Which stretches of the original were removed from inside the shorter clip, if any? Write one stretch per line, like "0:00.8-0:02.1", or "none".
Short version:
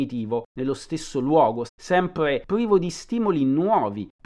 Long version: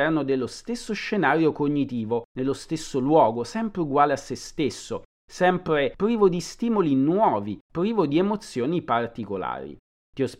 0:03.4-0:05.2